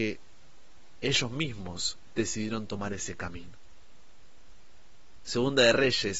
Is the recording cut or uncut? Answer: cut